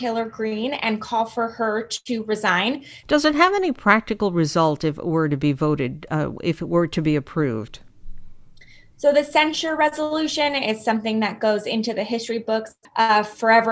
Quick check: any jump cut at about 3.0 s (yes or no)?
yes